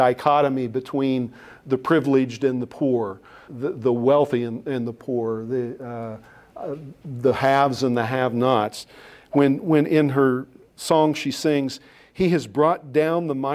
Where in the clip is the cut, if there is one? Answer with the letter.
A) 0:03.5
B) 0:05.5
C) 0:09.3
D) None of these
A